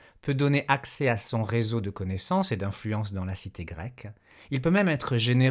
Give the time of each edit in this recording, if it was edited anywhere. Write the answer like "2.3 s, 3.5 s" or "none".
none